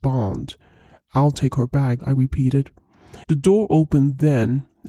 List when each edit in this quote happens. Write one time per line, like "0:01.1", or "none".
0:02.0
0:03.2